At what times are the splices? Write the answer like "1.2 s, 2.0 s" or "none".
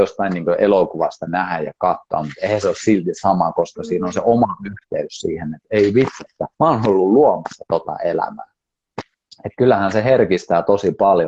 6.5 s